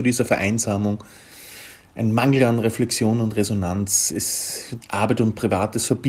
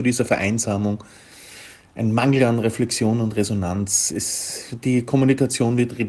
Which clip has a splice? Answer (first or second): first